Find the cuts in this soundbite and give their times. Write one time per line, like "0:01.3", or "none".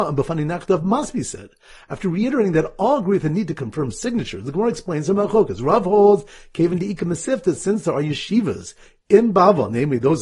none